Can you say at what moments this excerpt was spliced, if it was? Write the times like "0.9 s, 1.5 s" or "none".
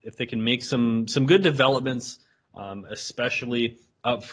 none